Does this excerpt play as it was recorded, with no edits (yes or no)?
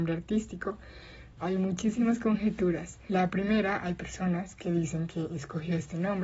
no